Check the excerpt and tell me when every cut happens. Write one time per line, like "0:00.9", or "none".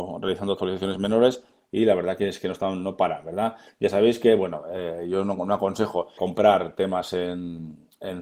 0:03.7
0:06.2